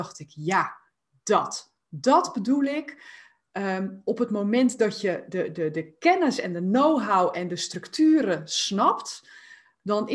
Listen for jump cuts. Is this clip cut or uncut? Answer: uncut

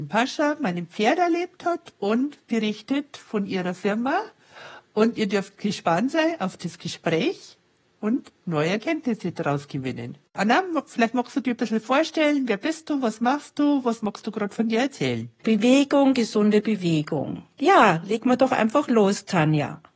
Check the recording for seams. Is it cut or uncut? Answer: cut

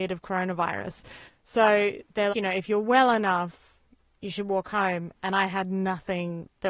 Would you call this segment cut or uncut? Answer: cut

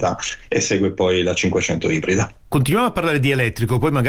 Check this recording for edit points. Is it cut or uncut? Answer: uncut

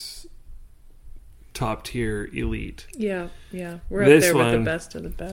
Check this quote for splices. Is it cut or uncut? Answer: uncut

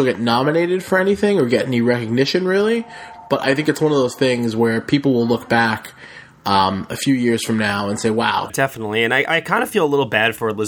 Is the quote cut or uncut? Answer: cut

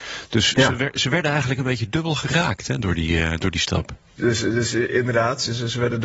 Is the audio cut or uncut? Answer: cut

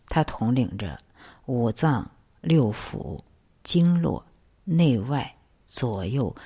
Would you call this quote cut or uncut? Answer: cut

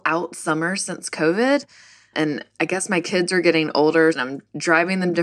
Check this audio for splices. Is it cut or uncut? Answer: cut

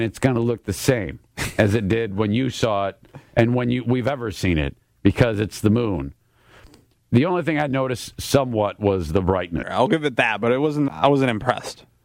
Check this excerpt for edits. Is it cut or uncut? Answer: cut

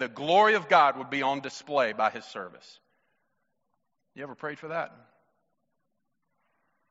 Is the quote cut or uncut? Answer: uncut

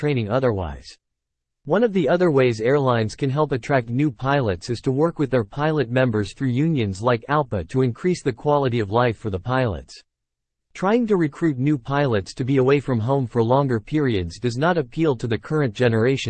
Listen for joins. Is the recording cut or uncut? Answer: uncut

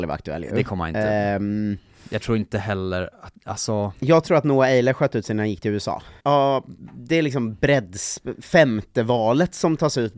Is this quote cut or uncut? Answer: cut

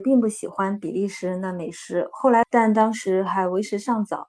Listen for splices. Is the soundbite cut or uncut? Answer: cut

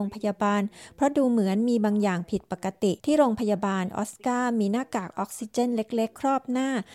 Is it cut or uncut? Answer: cut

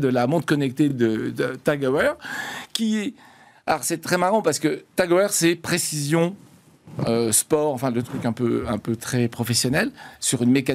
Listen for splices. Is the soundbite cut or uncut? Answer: uncut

